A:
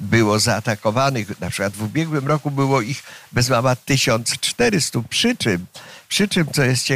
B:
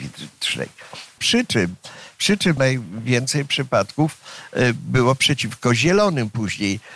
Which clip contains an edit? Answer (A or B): B